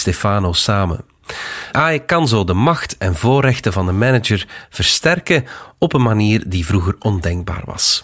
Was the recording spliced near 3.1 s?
no; 1 cut; at 1.7 s

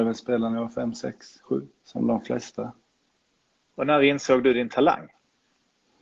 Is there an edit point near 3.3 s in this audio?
no; 1 cut; at 1.8 s

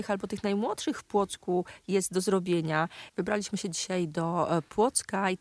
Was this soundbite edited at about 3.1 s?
yes; 1 cut; at 3.1 s

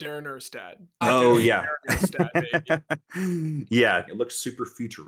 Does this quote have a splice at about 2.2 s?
no; 2 cuts; at 1.0 s, 4.1 s

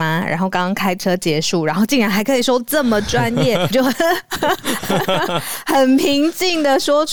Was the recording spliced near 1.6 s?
no; 1 cut; at 3.7 s

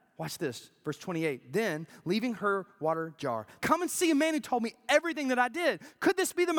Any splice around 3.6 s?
yes; 1 cut; at 3.6 s

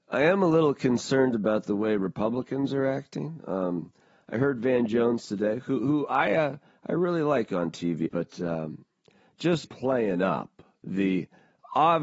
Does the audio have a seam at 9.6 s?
yes; 2 cuts; at 8.1 s, 9.6 s

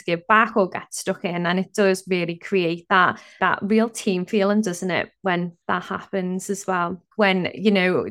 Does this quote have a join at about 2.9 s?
no; 1 cut; at 7.1 s

